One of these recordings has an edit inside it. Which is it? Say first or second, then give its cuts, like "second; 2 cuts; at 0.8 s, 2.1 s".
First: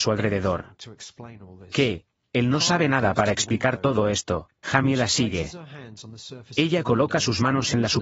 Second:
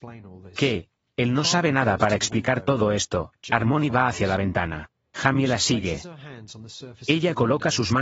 first; 1 cut; at 4.6 s